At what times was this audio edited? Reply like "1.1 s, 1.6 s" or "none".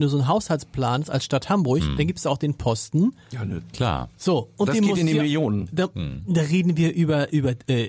none